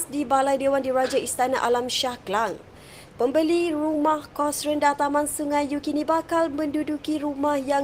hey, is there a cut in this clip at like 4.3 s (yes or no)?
no